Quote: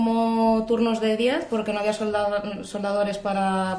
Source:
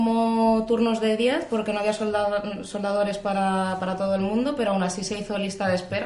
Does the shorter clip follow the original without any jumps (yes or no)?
yes